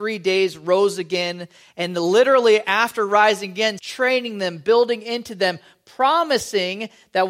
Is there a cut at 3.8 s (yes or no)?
yes